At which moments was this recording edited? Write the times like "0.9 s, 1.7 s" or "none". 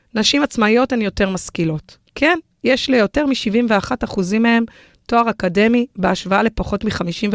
none